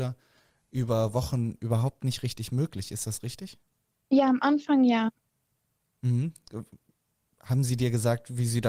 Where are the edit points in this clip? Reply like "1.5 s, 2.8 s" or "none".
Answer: none